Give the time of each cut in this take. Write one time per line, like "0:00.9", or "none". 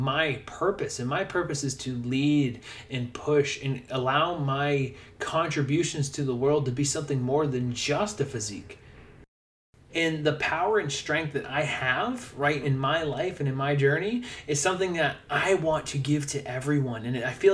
0:09.9
0:12.6

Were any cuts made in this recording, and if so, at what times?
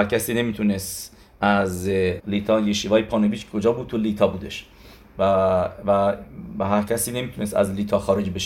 0:02.2

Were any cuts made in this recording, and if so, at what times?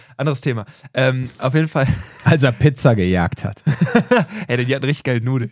none

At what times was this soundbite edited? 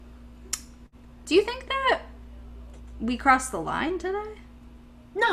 none

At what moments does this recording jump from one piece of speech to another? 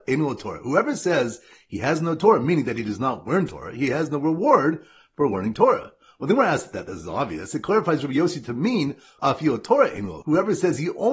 0:09.2

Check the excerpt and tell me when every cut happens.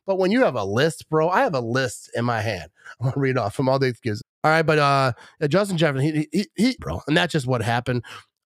0:04.2
0:06.8

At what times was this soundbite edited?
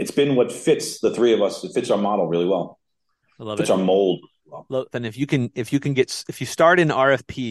0:04.9

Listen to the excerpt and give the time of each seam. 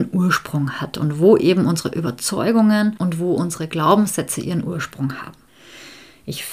none

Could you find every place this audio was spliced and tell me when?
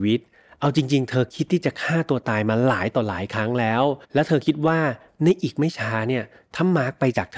0:04.0

